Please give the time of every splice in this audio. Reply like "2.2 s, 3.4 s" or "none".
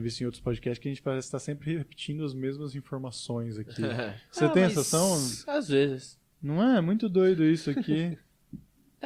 none